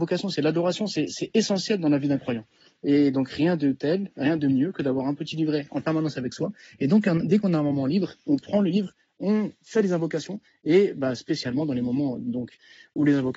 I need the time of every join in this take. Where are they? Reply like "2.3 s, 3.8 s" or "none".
none

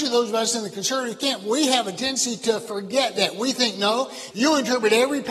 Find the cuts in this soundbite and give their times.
4.3 s

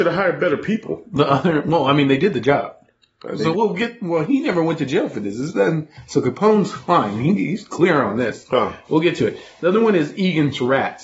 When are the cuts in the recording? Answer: 3.5 s

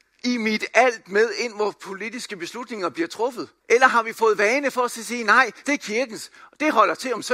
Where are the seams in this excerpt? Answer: 3.6 s, 5.6 s

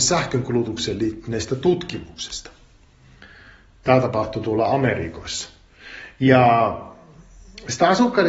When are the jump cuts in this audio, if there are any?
none

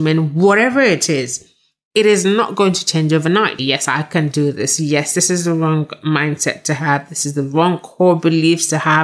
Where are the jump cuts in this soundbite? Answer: 3.6 s

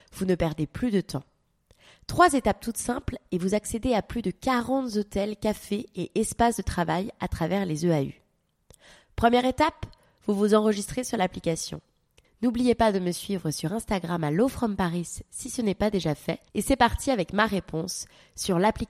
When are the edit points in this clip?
12.2 s, 16.5 s

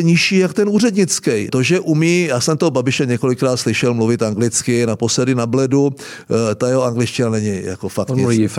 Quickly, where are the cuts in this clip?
1.5 s

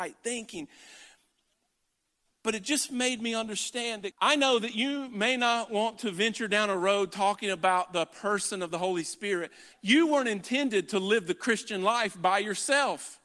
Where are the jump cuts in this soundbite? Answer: 4.1 s, 9.7 s

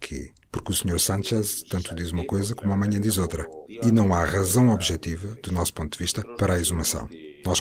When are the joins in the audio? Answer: 3.7 s

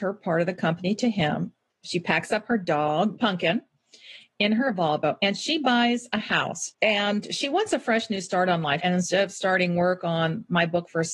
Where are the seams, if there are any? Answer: 6.7 s, 8.8 s

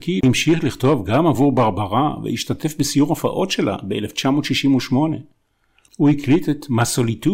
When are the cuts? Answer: 5.9 s

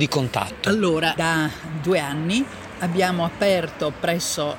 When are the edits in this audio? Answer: 1.2 s

